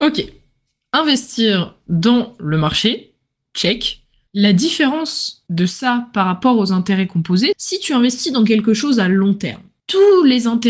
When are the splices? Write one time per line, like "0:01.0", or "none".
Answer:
0:04.3
0:07.5

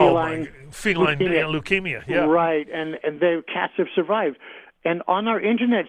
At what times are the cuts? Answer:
none

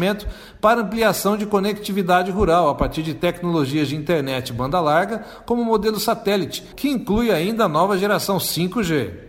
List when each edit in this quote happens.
0:06.7

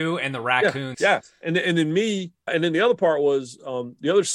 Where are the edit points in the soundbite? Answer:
0:00.9
0:02.5

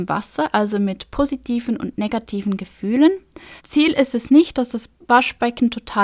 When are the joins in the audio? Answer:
0:03.6

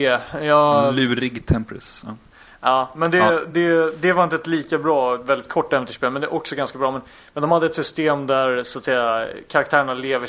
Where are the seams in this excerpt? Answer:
none

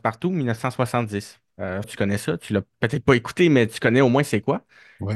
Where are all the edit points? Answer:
0:01.8

